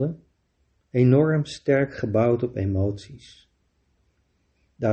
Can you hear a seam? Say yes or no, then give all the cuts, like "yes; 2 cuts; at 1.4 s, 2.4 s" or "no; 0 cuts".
no; 0 cuts